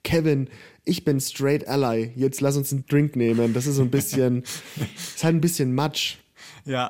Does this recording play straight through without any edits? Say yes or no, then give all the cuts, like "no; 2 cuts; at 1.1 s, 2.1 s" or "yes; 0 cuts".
yes; 0 cuts